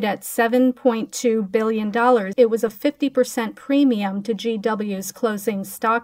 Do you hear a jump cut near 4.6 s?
no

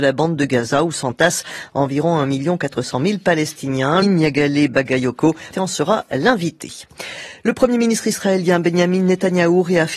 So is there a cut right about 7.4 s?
no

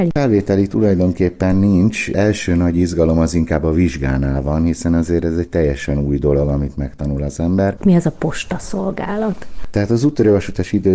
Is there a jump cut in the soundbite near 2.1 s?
no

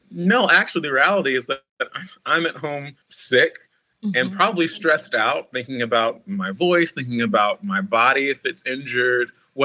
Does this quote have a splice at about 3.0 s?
yes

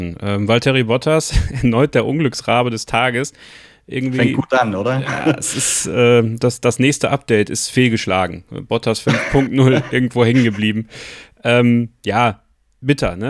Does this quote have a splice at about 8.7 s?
no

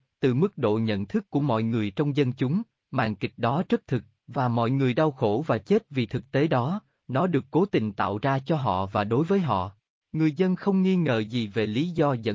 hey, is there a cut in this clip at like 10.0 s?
no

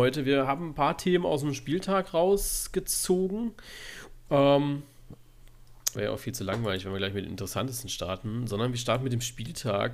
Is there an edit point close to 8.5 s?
no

